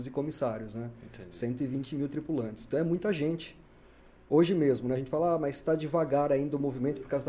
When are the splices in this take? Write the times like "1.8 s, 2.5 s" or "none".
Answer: none